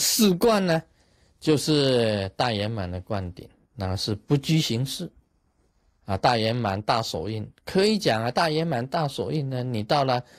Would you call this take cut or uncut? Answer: uncut